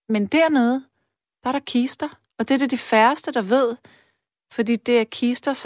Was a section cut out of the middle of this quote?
yes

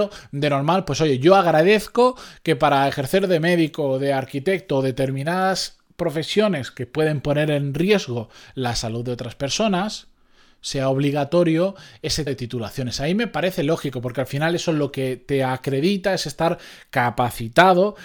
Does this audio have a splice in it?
yes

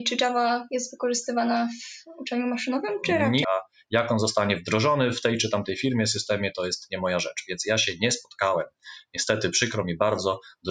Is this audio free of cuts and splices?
no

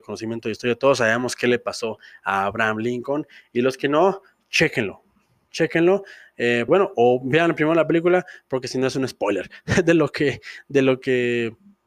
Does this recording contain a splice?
yes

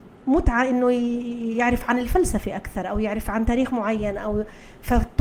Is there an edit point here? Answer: no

